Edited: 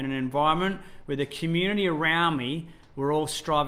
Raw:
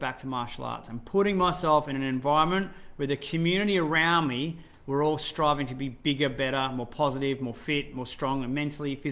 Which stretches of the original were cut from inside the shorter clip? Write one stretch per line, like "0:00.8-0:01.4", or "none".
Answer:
none

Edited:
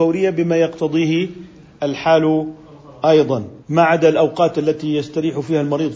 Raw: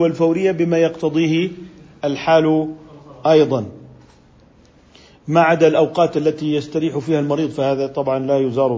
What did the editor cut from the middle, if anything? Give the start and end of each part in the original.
0:03.8-0:05.2

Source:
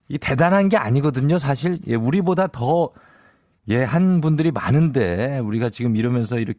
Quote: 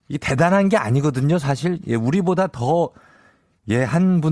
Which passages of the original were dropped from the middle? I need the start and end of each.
none

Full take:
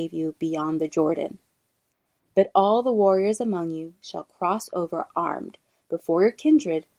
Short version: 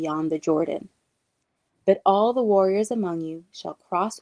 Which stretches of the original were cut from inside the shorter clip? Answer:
none

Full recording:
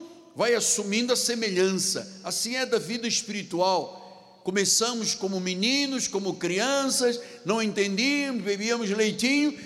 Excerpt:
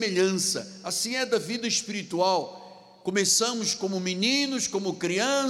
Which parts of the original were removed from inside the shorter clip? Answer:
none

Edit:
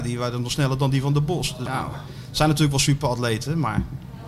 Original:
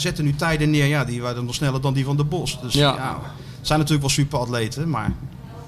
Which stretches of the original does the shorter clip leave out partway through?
0:02.7-0:03.0

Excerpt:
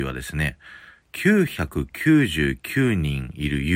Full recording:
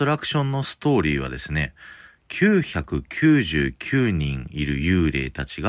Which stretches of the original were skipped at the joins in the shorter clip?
none

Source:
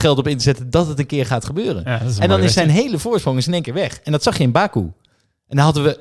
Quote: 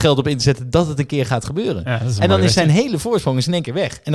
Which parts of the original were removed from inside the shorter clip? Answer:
none

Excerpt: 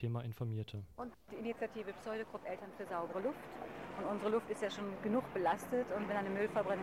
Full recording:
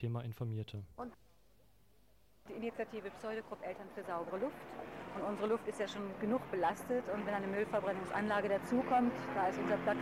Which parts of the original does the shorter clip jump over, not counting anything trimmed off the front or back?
0:01.2-0:02.4

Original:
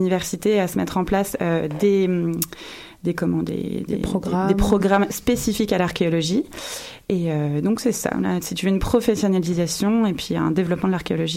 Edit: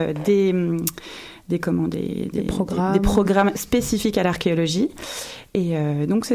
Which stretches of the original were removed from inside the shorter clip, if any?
none

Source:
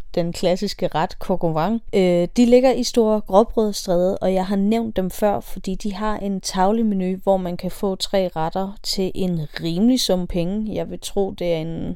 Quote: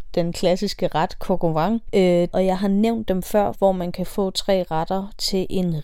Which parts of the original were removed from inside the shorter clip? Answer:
0:02.3-0:04.2
0:05.4-0:07.2

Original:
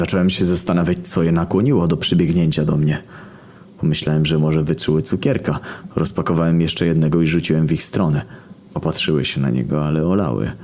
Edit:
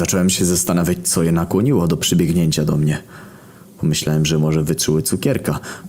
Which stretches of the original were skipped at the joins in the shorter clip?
none

